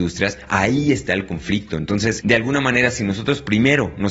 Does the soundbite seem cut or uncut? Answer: uncut